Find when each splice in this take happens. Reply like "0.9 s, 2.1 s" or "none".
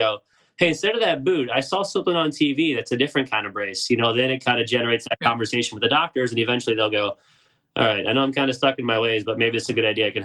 none